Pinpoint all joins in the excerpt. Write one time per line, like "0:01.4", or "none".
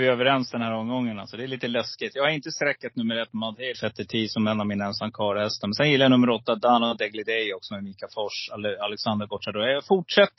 0:03.7